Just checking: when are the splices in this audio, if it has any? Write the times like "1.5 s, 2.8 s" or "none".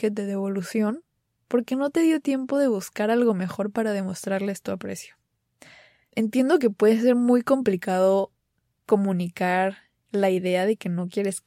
6.1 s